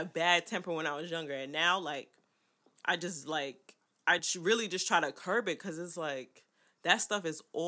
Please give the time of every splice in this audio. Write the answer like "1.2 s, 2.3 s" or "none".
none